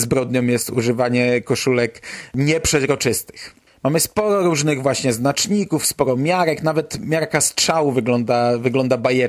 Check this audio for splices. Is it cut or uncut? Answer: uncut